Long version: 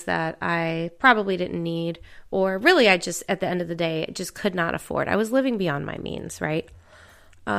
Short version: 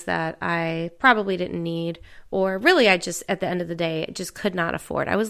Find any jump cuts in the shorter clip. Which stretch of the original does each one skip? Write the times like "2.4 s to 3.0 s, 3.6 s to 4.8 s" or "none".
none